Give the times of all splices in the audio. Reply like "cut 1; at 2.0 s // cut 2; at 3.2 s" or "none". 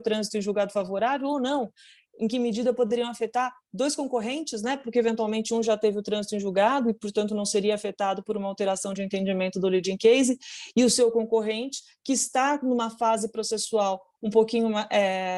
none